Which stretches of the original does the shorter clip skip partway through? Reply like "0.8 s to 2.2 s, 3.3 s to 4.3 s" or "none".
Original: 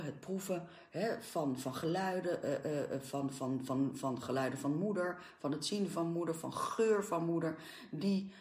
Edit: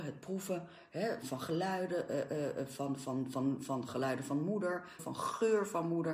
1.2 s to 1.6 s, 5.3 s to 6.4 s